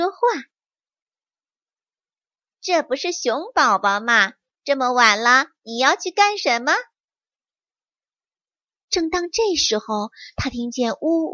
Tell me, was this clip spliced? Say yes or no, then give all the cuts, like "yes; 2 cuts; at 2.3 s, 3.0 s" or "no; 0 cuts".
yes; 1 cut; at 8.8 s